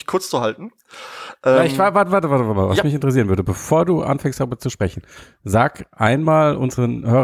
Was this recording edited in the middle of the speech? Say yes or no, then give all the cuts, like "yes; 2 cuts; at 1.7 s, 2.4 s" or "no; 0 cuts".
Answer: no; 0 cuts